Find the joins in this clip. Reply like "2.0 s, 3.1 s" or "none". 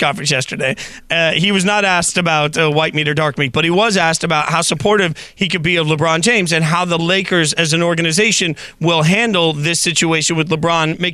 none